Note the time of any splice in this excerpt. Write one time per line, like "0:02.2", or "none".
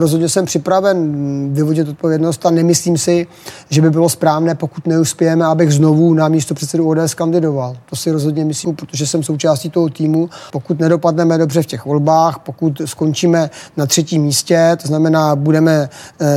0:08.6
0:10.5